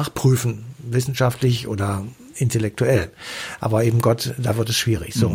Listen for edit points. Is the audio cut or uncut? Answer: uncut